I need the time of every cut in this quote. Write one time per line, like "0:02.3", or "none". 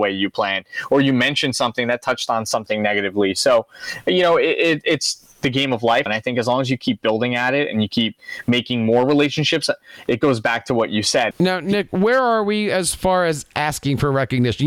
0:06.1
0:11.3